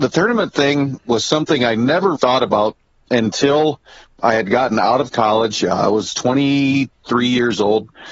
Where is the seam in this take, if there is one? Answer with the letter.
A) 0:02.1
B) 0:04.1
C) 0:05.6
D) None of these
A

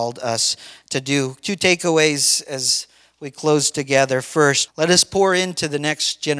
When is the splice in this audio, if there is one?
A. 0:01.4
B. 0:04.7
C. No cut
B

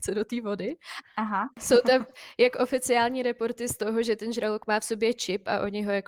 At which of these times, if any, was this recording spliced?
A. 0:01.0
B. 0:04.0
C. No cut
A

